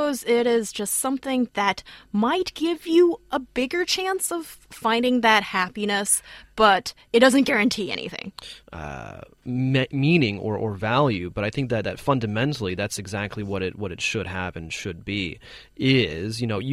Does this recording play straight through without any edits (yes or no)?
no